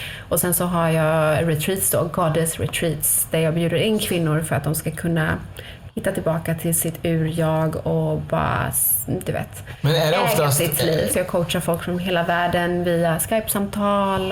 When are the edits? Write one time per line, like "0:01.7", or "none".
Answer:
0:11.1